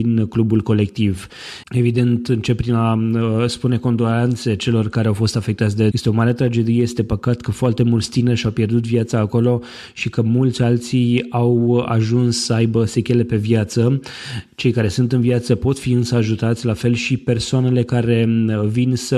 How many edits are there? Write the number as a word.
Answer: two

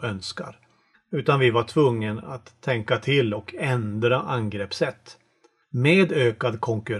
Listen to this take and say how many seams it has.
two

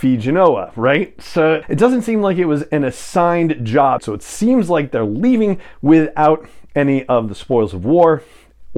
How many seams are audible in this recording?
two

